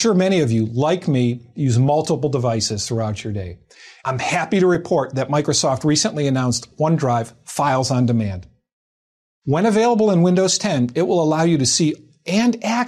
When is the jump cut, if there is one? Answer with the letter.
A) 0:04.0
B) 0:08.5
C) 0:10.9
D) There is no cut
A